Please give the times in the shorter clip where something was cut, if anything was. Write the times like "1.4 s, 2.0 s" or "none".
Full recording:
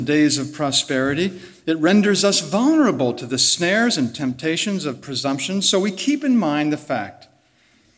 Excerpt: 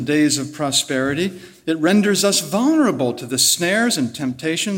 none